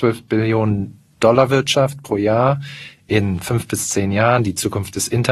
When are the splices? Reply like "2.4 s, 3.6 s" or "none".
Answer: none